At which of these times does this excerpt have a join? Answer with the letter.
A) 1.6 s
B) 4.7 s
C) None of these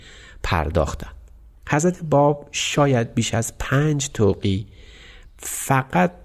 A